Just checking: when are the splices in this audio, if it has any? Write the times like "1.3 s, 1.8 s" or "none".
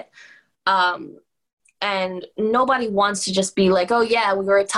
none